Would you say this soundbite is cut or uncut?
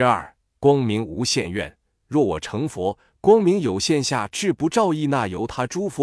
uncut